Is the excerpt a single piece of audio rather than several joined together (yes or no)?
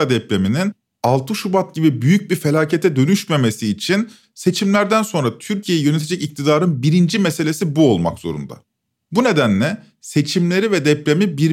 yes